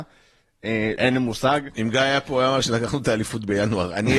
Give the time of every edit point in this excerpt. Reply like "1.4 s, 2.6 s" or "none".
1.0 s